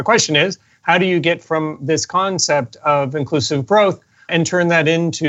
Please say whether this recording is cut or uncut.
cut